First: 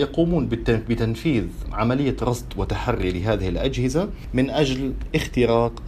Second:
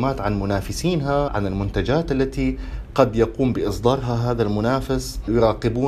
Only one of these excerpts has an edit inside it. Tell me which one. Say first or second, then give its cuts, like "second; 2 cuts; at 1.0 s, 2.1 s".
second; 1 cut; at 1.3 s